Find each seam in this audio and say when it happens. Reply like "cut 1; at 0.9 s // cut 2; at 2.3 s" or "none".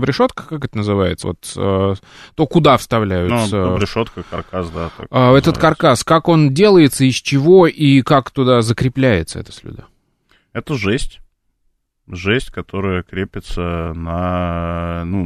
none